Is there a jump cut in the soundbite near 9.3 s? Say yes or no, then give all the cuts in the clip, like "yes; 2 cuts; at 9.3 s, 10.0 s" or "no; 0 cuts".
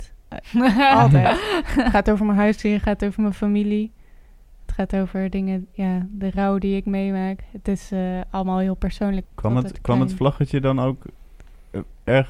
yes; 1 cut; at 9.3 s